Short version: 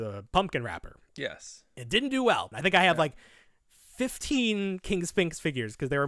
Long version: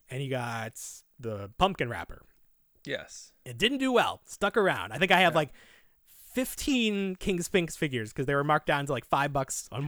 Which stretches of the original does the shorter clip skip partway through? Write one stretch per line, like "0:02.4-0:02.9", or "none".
0:02.3-0:02.8
0:04.2-0:04.9